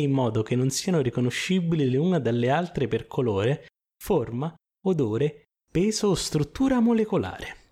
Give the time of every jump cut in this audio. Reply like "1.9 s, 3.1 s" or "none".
none